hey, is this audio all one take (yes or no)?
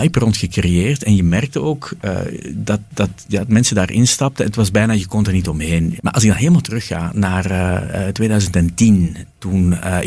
no